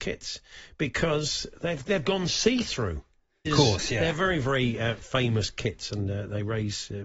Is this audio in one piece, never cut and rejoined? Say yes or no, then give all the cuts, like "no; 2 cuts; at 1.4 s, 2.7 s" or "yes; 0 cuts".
no; 1 cut; at 3.4 s